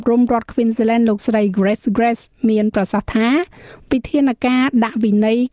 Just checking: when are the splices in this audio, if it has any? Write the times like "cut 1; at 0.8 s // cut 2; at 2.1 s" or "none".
none